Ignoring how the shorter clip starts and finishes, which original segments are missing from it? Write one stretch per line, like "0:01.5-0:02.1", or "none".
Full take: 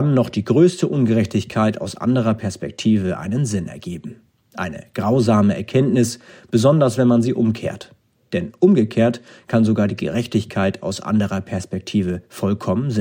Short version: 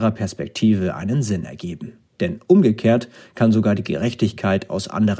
0:04.3-0:08.2